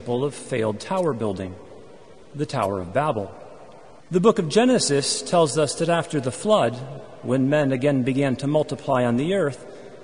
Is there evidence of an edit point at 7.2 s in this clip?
no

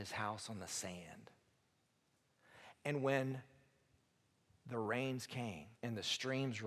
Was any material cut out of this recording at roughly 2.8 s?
no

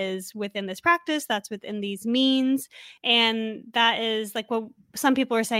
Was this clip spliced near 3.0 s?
yes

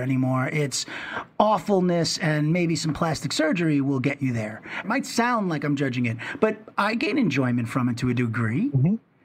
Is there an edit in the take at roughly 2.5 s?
no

